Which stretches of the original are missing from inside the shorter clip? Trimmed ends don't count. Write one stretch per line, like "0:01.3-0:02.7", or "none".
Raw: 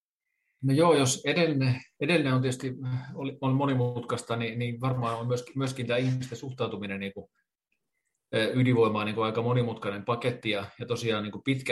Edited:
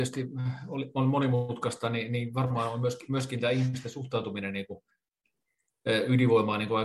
none

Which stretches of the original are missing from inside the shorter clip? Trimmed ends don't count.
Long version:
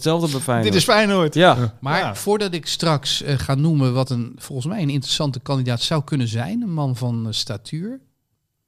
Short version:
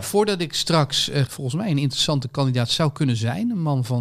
0:03.4-0:04.4

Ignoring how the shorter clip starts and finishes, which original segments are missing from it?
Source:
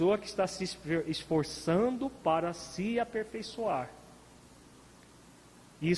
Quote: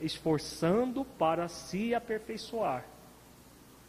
none

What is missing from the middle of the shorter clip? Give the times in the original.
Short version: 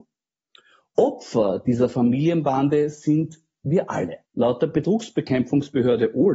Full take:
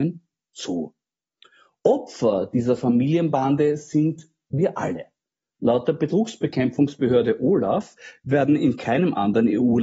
0:05.1-0:05.5

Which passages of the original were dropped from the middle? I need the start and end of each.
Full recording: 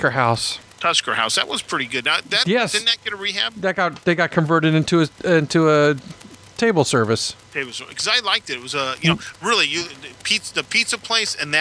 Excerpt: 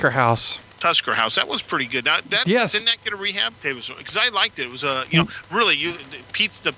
0:03.5-0:07.4

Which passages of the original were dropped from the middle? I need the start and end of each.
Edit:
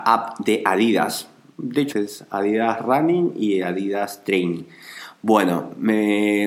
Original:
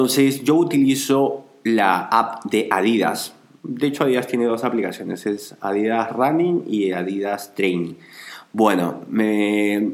0:04.0-0:05.2

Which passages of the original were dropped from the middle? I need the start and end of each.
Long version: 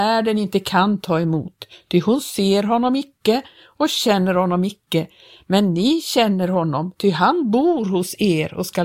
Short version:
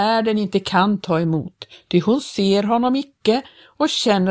none

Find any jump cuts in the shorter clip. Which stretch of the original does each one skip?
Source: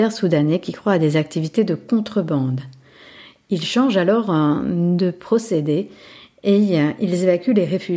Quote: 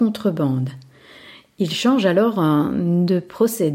none

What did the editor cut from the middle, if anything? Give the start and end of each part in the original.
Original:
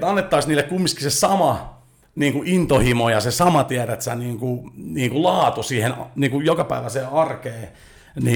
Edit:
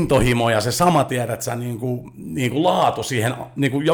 none

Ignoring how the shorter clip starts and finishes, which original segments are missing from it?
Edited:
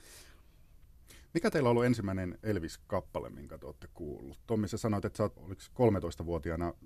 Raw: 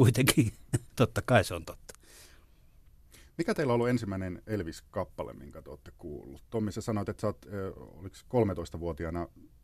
0:07.4-0:07.9

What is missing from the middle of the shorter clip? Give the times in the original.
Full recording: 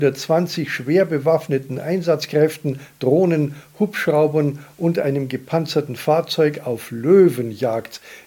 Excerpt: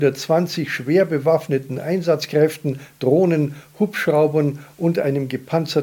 none

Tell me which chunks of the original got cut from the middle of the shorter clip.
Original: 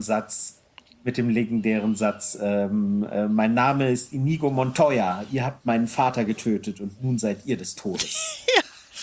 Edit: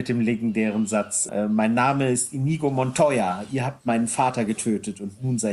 0:02.4-0:03.1

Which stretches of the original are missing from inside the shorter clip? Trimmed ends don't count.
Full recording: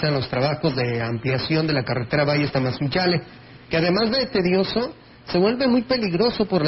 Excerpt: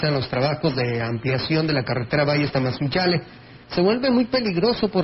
0:03.6-0:05.2

